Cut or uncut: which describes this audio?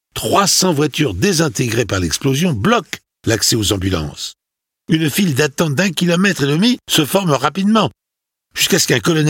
cut